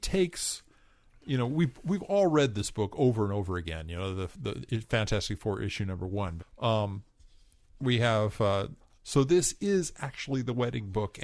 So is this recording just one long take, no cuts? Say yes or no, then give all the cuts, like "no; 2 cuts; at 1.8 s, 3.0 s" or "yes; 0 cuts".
no; 2 cuts; at 6.4 s, 8.9 s